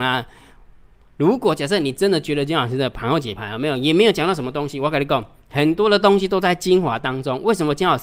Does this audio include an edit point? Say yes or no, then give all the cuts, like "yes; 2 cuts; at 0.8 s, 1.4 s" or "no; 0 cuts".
no; 0 cuts